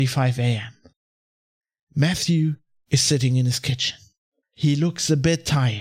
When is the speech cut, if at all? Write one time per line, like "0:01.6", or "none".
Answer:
0:04.4